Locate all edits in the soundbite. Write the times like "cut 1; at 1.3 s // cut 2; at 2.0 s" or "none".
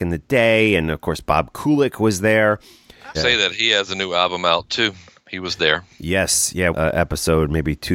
cut 1; at 3.1 s // cut 2; at 6.7 s